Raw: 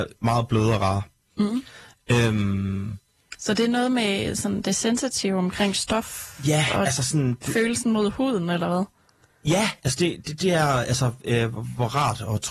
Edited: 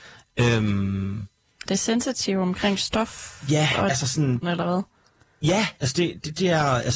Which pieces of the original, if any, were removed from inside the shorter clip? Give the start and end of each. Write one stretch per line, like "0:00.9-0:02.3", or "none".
0:03.4-0:04.6
0:07.4-0:08.5